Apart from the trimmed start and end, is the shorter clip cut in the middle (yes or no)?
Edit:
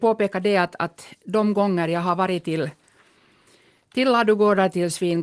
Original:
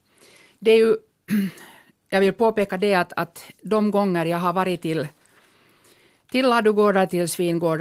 no